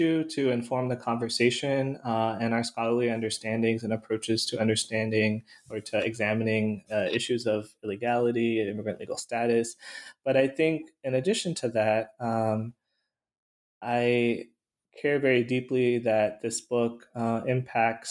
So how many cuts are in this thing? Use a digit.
0